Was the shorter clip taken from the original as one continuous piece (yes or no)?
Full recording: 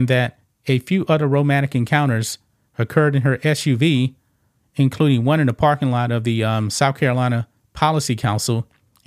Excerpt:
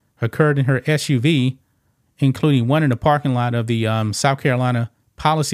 yes